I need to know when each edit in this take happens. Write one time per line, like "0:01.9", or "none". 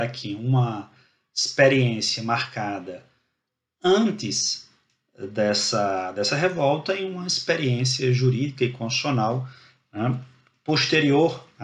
none